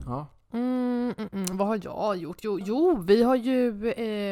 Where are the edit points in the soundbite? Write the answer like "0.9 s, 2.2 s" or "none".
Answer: 1.3 s, 2.6 s

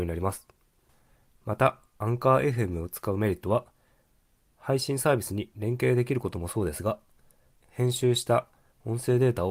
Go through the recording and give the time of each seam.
7.6 s

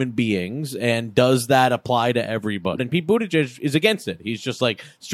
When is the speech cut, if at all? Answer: 2.8 s

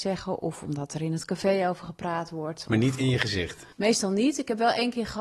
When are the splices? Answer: 3.7 s

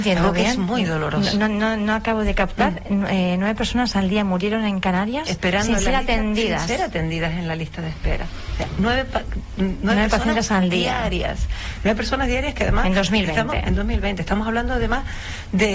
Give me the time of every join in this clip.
none

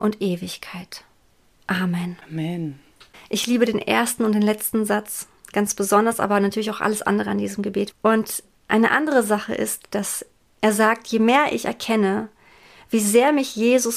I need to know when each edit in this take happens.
7.9 s

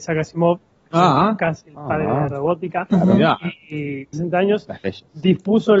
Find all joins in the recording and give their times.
4.1 s

